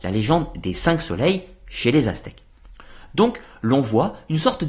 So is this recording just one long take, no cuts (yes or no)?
yes